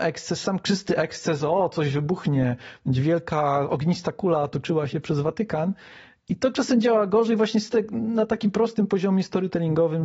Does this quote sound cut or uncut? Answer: uncut